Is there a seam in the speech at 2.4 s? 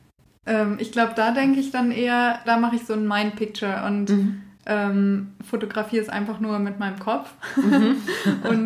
yes; 1 cut; at 2.4 s

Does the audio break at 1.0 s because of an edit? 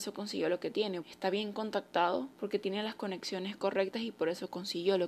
yes; 2 cuts; at 1.0 s, 2.3 s

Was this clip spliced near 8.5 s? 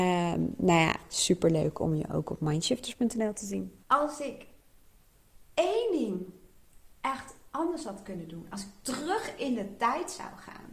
no; 1 cut; at 3.8 s

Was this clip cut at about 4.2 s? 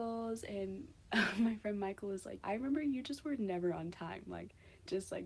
no; 1 cut; at 2.4 s

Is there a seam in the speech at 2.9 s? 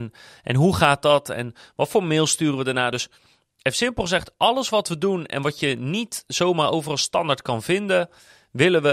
no; 0 cuts

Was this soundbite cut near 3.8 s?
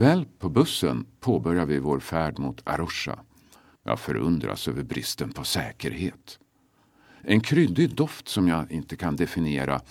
yes; 1 cut; at 3.8 s

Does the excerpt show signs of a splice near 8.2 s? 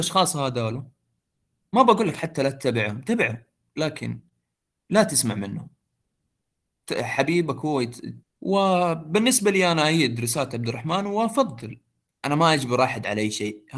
yes; 1 cut; at 8.2 s

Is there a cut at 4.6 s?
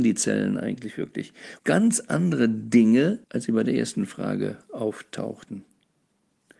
no; 2 cuts; at 1.6 s, 3.2 s

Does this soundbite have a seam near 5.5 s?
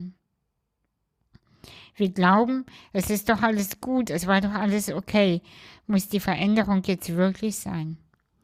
no; 0 cuts

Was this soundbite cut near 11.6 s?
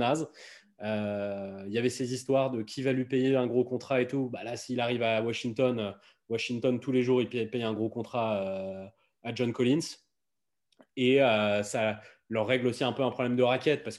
no; 0 cuts

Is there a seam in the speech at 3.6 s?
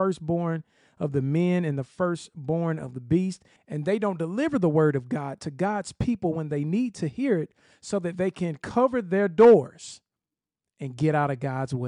yes; 1 cut; at 3.6 s

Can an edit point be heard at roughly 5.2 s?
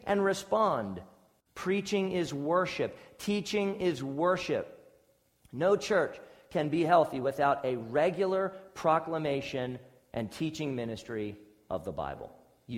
no; 1 cut; at 1.4 s

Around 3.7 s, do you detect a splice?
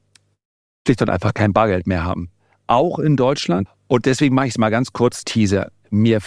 yes; 2 cuts; at 3.7 s, 5.2 s

